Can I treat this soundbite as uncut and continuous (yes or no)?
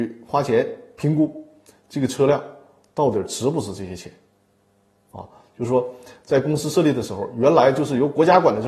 no